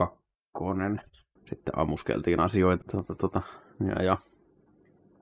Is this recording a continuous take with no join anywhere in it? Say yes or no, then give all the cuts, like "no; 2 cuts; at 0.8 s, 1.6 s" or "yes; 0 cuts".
no; 2 cuts; at 1.4 s, 2.8 s